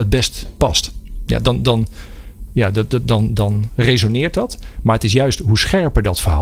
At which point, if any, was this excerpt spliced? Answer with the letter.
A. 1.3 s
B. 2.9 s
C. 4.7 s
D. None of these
A